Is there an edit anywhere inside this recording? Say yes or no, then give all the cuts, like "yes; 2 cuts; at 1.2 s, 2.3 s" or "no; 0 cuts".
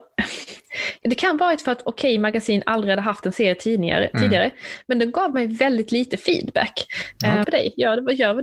yes; 2 cuts; at 1.0 s, 7.4 s